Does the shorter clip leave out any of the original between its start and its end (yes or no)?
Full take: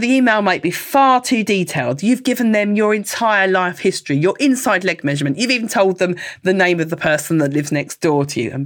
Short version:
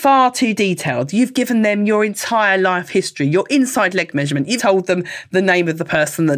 yes